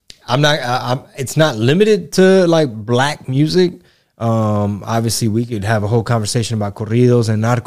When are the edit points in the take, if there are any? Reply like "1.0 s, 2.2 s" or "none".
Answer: none